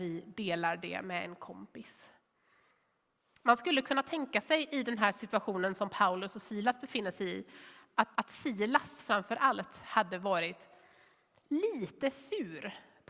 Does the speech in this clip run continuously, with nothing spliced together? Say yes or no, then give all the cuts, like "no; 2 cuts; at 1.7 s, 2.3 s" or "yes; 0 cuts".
no; 1 cut; at 8.2 s